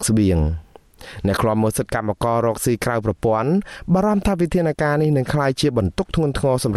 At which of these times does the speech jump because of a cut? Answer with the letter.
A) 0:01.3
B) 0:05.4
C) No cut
C